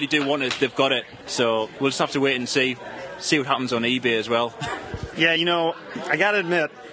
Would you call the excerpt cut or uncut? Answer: uncut